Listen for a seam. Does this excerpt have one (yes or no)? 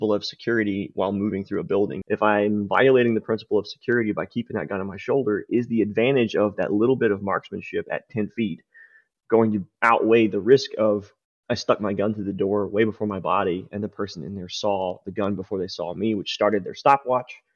yes